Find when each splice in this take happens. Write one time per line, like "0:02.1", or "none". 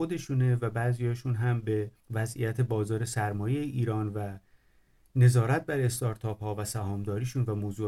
0:02.0